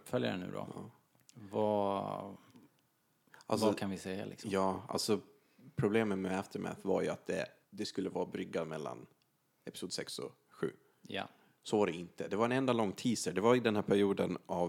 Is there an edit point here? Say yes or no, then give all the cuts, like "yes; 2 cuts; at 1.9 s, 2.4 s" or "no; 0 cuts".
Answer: no; 0 cuts